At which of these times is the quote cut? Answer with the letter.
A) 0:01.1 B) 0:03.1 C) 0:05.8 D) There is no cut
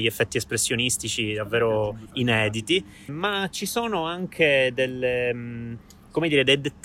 B